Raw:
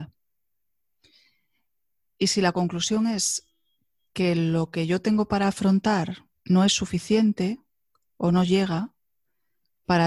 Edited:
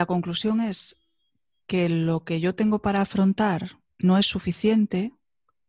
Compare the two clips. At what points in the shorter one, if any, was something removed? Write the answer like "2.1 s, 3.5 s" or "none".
none